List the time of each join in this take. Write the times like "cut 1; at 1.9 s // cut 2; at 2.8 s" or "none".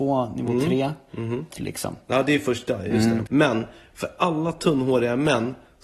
cut 1; at 1.5 s // cut 2; at 3.3 s